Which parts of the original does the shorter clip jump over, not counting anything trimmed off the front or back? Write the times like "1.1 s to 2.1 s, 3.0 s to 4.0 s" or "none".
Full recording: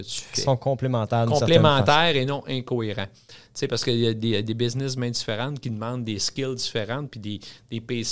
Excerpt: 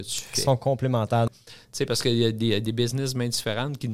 1.3 s to 3.1 s